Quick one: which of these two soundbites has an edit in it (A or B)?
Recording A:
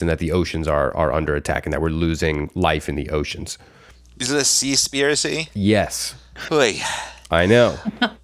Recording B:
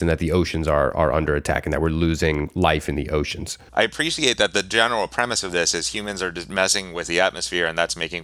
B